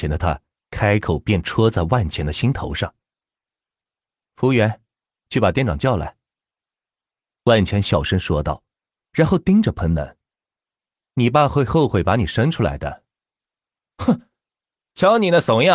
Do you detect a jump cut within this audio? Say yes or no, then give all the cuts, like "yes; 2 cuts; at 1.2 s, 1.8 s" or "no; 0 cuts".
no; 0 cuts